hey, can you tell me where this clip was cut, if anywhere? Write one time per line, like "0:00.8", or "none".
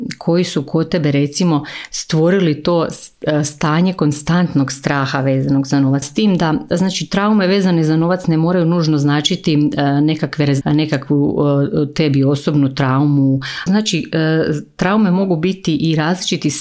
0:06.0
0:10.6
0:13.7